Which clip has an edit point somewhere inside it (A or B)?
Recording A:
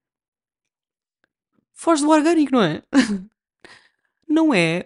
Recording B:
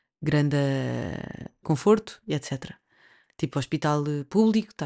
B